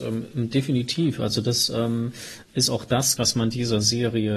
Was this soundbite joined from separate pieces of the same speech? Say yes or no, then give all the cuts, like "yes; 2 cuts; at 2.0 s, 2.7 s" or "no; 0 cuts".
yes; 1 cut; at 3.2 s